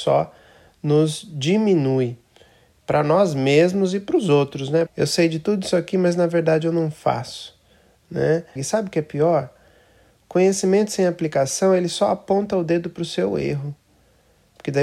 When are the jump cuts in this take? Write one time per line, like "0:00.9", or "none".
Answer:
0:04.9
0:08.6